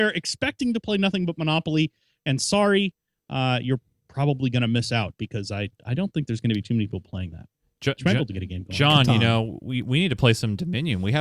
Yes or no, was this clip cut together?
no